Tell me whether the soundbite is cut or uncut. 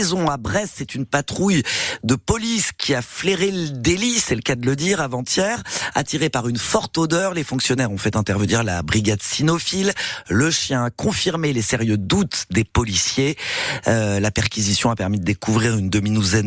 uncut